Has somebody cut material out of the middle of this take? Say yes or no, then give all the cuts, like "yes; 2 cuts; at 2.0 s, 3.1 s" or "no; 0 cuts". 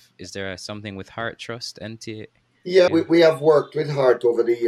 yes; 1 cut; at 2.9 s